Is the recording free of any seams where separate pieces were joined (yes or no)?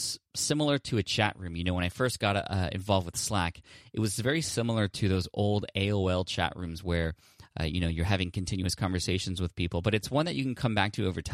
yes